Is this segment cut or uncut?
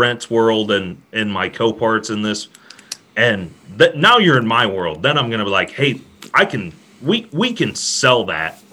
uncut